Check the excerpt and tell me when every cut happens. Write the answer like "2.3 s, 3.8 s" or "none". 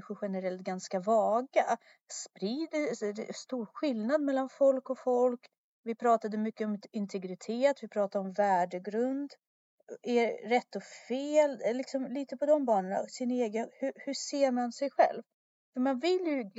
none